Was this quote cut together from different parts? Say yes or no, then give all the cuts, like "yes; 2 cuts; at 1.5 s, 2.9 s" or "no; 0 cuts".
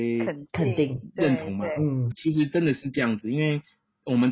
yes; 1 cut; at 2.1 s